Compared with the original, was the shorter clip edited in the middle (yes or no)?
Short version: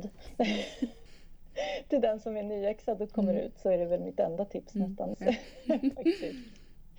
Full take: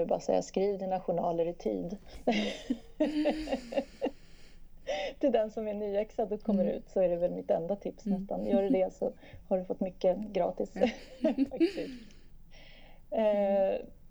yes